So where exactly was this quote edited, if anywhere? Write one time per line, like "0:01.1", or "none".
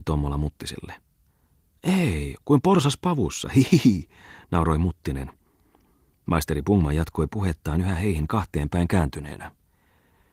0:02.4

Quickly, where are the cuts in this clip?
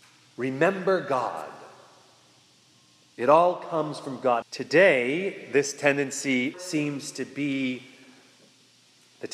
0:04.4
0:06.5

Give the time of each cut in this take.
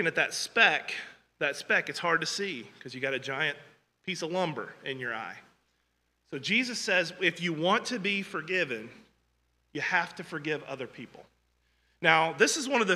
none

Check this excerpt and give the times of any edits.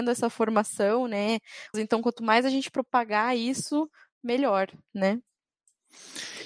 0:01.7

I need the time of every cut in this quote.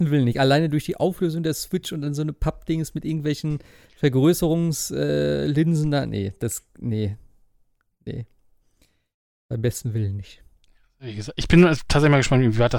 none

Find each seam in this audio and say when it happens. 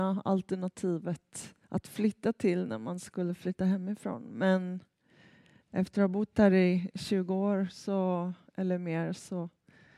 0:01.6

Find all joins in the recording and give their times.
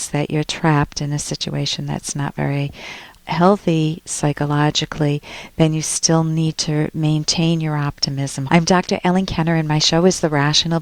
0:03.2
0:08.5

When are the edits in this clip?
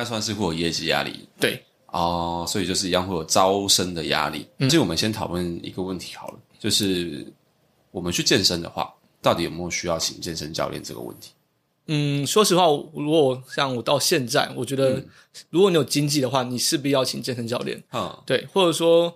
none

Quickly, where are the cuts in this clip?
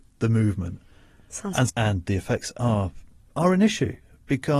0:01.7

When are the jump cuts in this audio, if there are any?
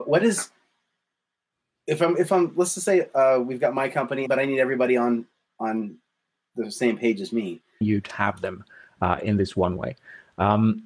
0:04.3
0:07.8

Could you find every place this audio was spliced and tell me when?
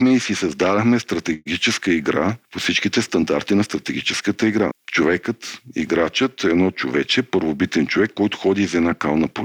0:04.7

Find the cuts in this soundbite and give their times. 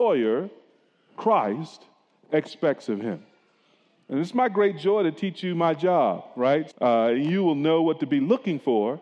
0:06.7

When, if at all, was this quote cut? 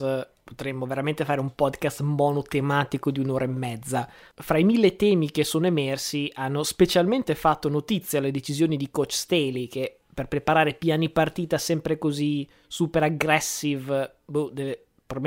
none

